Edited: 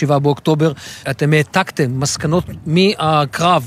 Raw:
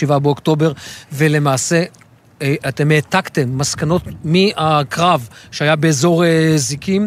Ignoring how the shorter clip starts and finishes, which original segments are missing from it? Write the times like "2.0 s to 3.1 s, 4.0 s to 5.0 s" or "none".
1.0 s to 2.6 s